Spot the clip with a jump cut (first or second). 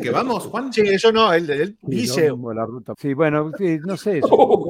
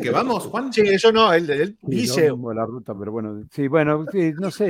first